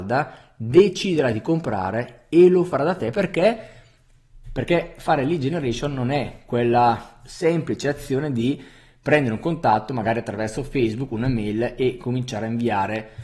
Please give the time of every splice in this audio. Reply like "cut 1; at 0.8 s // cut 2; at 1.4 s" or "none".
cut 1; at 4.4 s